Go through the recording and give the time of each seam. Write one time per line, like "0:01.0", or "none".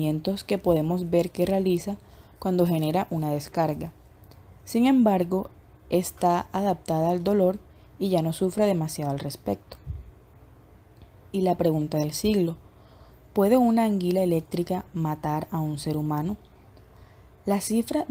none